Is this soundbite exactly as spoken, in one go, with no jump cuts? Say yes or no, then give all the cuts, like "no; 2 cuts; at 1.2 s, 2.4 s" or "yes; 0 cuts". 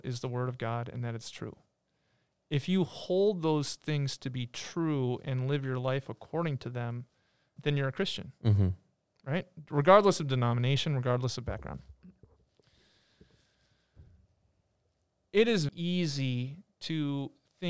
no; 2 cuts; at 7.6 s, 15.7 s